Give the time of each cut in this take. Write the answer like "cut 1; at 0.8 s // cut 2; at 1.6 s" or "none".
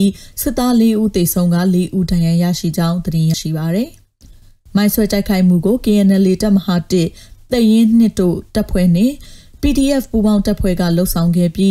cut 1; at 3.3 s